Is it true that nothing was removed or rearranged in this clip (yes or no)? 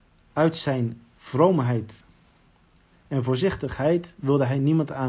yes